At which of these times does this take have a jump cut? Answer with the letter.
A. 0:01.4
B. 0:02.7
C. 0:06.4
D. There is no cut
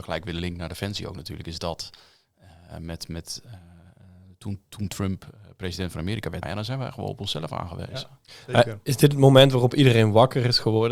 C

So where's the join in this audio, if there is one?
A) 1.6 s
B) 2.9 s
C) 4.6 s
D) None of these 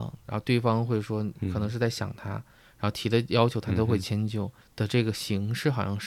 C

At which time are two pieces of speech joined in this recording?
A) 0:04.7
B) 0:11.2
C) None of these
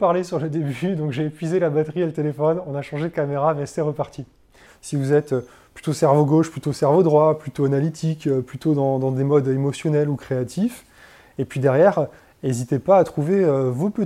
A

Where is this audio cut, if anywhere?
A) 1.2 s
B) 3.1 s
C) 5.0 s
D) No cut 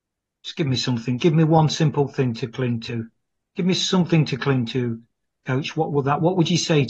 A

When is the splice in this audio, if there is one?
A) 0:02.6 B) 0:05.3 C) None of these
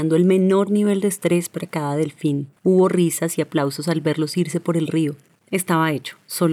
A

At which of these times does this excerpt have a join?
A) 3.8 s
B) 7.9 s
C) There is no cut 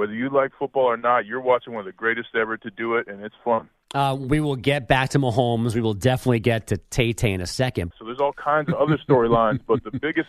B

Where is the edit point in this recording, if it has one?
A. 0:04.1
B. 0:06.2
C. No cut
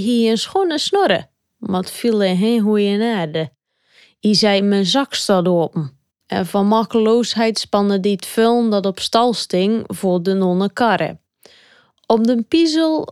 B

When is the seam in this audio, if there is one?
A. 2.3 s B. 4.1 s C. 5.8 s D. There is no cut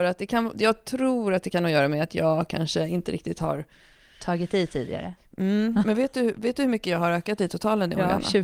D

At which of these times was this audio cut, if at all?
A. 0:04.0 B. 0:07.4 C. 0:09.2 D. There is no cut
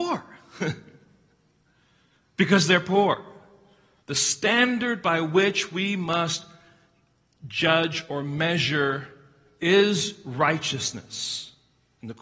A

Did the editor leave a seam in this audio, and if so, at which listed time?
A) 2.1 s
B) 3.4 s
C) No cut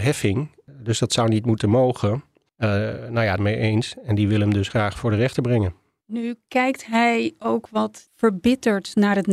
B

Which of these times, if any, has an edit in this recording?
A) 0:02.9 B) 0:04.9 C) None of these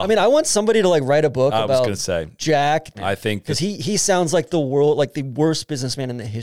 A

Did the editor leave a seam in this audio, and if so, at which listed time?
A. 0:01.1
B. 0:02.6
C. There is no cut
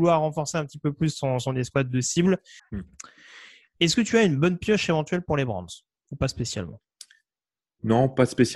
B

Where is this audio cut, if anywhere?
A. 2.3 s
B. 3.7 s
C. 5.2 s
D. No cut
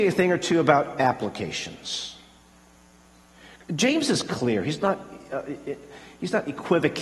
D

